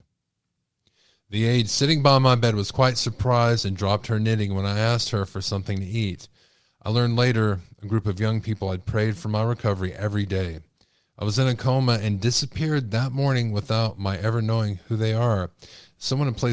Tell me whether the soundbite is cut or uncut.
uncut